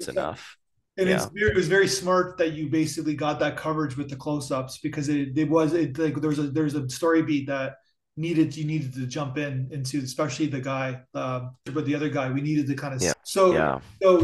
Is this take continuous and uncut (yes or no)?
no